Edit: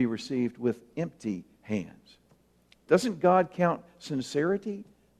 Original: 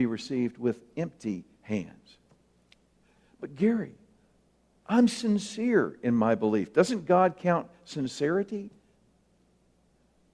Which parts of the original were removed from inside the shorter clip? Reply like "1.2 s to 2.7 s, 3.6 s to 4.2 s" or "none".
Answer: 2.9 s to 6.7 s

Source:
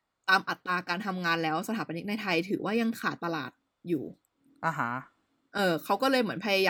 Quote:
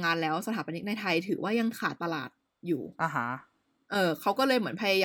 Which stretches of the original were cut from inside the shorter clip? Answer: 4.2 s to 4.6 s

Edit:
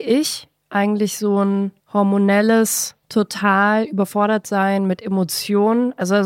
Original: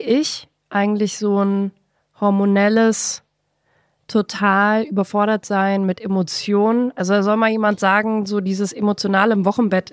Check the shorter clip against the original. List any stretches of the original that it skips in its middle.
1.8 s to 2.1 s, 3.3 s to 4.0 s

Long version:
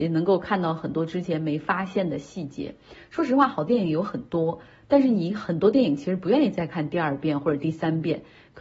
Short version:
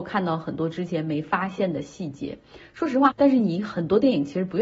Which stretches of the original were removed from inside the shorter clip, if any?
3.5 s to 4.8 s

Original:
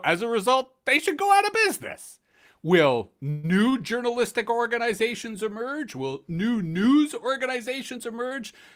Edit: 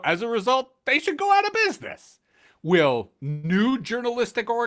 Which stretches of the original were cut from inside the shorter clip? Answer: none

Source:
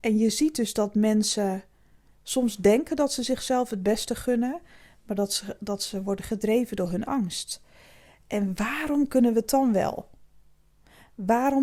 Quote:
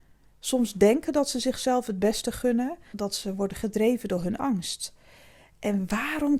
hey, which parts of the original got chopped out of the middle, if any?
4.7 s to 5.6 s

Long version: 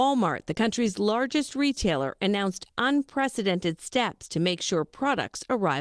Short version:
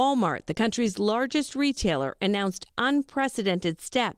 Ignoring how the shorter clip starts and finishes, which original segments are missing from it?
none

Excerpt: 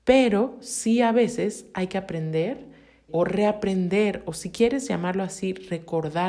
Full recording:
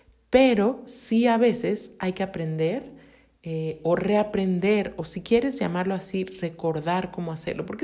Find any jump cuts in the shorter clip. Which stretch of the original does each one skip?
3.3 s to 3.8 s

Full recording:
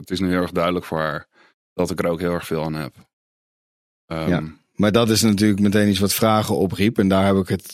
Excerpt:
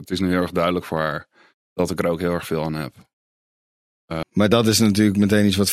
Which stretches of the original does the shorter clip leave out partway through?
4.2 s to 4.7 s

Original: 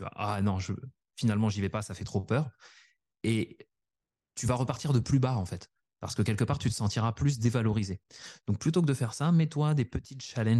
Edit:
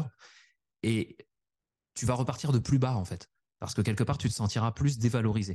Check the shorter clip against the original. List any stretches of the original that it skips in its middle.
none

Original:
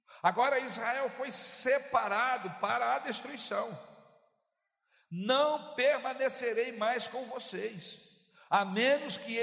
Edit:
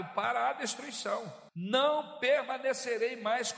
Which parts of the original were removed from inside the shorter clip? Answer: 3.9 s to 5.0 s

